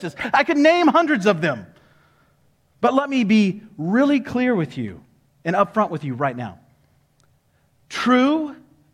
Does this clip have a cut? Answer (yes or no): no